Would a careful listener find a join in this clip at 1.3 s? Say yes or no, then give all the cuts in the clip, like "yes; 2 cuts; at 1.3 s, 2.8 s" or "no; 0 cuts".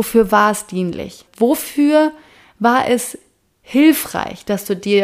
yes; 1 cut; at 1.3 s